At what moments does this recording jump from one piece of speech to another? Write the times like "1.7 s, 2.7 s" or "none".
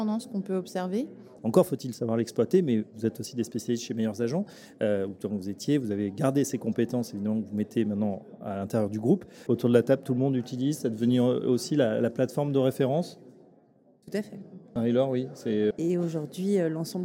1.4 s, 9.5 s, 15.7 s